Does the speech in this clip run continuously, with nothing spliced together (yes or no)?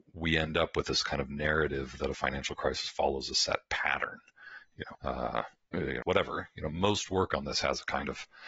no